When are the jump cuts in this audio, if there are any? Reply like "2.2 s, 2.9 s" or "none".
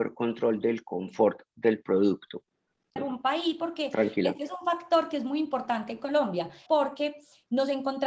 3.0 s, 6.7 s